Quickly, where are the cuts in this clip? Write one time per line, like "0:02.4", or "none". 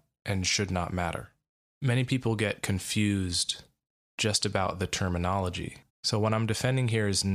0:05.9